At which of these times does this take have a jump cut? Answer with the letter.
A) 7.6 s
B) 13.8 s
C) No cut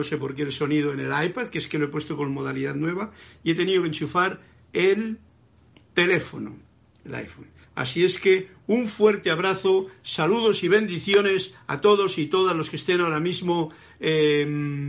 A